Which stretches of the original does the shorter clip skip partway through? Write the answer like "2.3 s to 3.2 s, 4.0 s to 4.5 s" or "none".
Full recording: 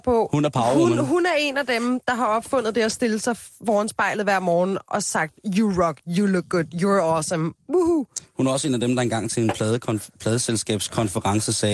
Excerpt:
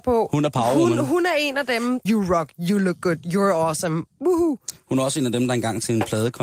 2.1 s to 5.5 s